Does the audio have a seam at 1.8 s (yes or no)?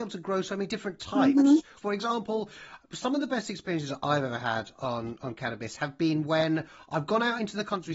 yes